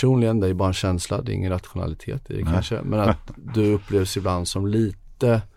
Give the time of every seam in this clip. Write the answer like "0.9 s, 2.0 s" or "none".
none